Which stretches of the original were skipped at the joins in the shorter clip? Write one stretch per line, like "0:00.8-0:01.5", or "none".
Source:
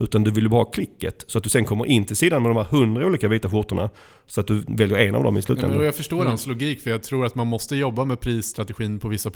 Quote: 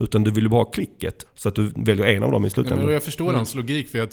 0:01.2-0:04.2